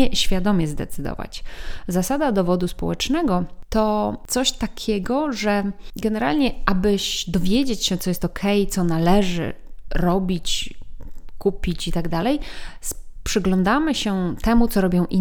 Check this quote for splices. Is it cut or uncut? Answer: uncut